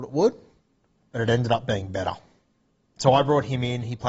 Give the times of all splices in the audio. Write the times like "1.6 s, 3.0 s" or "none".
none